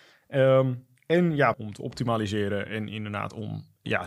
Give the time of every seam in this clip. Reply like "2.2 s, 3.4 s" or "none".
1.5 s